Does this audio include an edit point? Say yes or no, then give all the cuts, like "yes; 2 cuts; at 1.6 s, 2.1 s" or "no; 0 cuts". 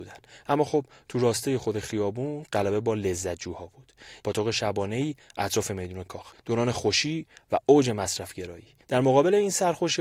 yes; 3 cuts; at 4.2 s, 6.3 s, 8.8 s